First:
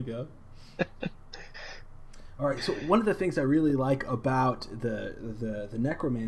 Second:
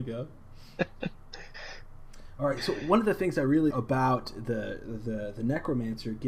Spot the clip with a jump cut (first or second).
second